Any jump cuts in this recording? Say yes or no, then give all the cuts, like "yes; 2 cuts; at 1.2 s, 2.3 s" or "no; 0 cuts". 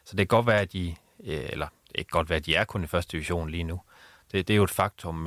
no; 0 cuts